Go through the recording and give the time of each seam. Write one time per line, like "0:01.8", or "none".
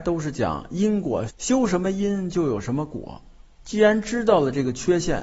0:01.3
0:03.6

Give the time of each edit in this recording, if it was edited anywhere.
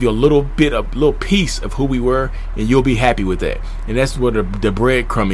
none

